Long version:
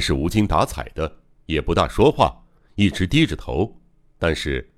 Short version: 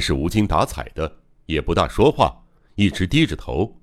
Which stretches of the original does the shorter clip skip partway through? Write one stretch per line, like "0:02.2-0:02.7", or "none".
none